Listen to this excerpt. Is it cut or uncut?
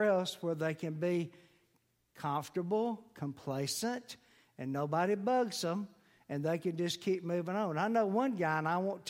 uncut